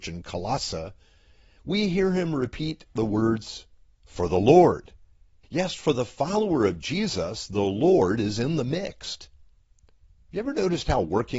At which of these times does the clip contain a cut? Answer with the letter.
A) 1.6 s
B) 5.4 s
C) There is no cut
B